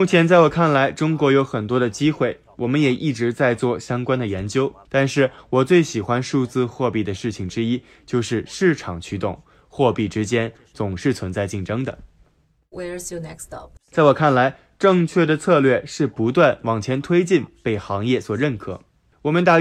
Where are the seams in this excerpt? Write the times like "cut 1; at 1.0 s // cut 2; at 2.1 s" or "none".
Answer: cut 1; at 4.9 s // cut 2; at 13.8 s

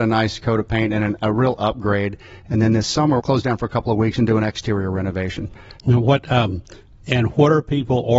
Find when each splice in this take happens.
cut 1; at 3.2 s // cut 2; at 5.8 s

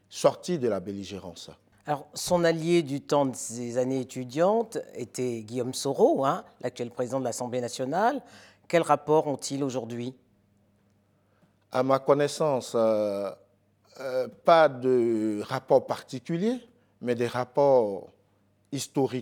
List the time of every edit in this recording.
none

